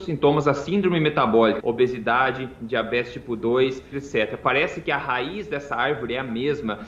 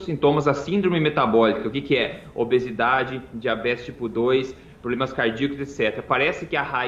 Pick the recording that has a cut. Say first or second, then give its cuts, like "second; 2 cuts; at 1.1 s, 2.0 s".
first; 2 cuts; at 1.6 s, 3.9 s